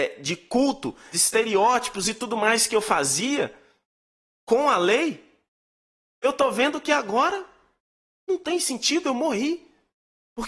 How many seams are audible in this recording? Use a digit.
1